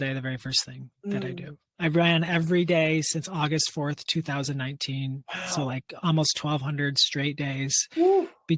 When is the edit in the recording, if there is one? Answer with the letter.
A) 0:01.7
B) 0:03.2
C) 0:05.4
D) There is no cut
D